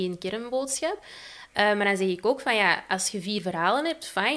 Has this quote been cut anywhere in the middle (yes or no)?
no